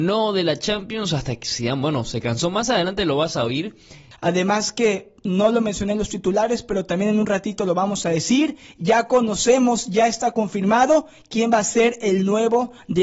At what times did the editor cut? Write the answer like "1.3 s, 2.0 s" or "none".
4.1 s